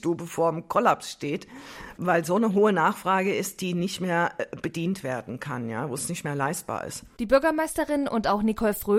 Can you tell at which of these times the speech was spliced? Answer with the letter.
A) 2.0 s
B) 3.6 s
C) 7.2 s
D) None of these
C